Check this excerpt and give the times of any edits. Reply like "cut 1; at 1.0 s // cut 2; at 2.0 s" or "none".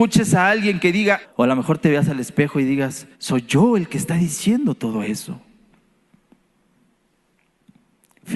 cut 1; at 1.2 s // cut 2; at 3.1 s